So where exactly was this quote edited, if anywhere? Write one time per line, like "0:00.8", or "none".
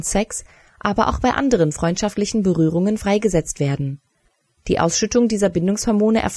none